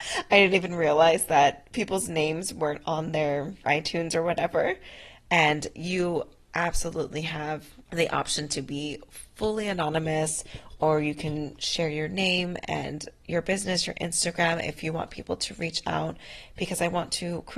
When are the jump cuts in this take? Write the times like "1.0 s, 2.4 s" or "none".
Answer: 5.3 s